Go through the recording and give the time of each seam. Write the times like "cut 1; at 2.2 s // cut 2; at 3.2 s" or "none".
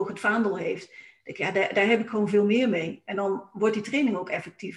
none